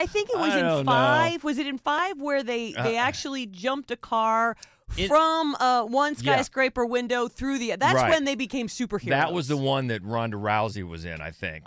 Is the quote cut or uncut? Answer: uncut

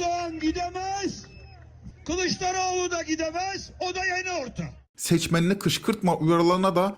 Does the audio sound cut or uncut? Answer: cut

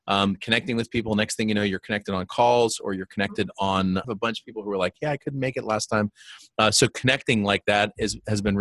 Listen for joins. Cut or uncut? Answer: cut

